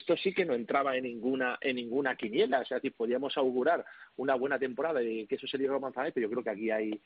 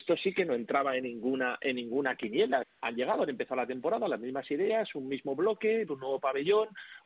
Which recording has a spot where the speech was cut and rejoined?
second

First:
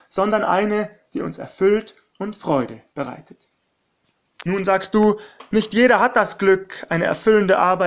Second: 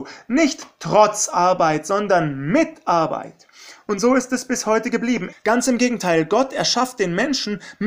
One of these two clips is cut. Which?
second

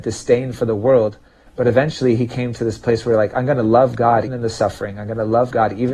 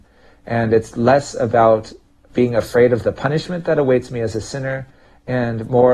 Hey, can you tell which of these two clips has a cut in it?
first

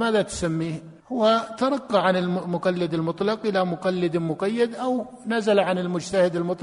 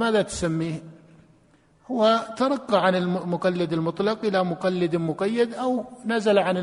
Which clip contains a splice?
first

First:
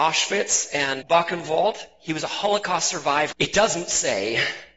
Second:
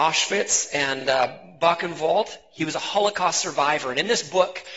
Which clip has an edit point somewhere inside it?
first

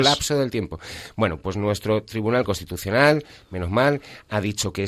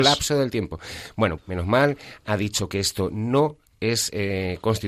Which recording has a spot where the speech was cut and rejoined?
second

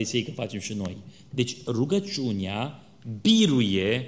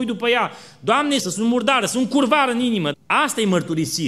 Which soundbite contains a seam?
second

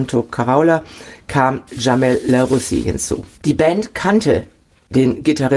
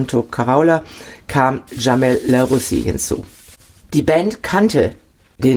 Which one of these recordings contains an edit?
first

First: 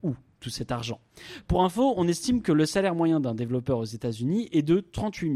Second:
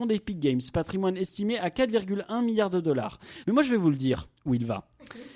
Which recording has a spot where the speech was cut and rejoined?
second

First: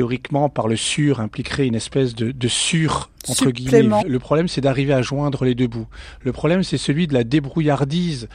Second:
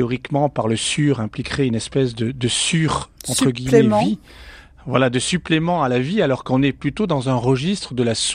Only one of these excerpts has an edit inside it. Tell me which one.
first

